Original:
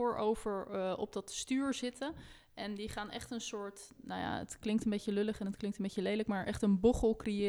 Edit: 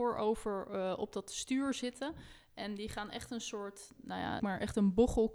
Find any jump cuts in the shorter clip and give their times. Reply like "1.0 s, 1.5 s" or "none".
4.4 s